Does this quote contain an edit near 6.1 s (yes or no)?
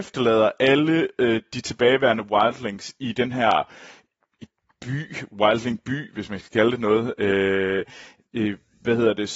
no